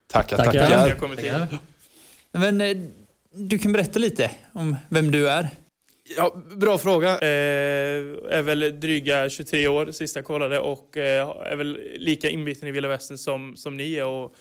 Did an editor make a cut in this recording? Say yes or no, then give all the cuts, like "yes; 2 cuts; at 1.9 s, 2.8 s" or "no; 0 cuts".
yes; 1 cut; at 7.2 s